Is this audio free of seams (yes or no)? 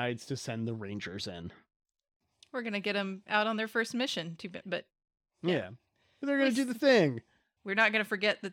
no